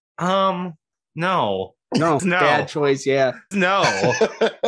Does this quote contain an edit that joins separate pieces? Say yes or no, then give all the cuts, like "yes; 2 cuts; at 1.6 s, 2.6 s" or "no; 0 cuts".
yes; 2 cuts; at 2.2 s, 3.5 s